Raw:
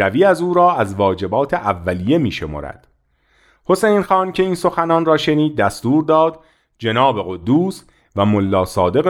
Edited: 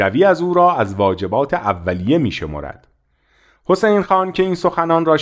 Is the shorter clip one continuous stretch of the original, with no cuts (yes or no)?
yes